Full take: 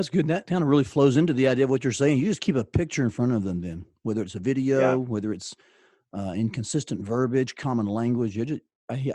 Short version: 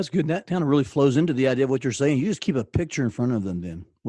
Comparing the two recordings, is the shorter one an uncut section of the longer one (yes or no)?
yes